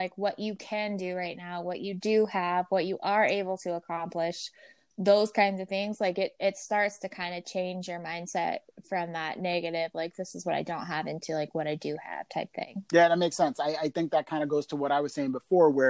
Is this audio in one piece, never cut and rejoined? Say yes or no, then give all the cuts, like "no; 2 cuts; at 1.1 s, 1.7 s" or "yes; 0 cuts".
yes; 0 cuts